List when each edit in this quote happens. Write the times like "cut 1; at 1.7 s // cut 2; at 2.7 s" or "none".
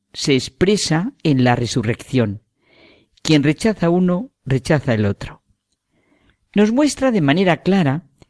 none